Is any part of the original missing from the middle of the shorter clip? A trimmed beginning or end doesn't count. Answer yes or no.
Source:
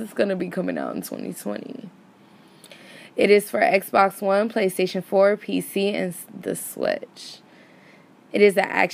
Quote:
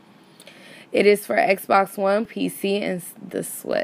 yes